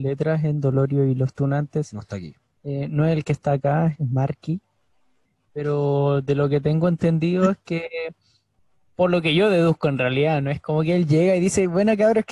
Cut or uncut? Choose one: cut